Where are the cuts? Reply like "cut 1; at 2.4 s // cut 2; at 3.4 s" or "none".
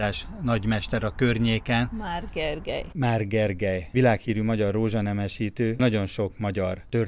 none